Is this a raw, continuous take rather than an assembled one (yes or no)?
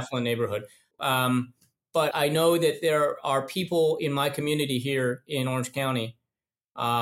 no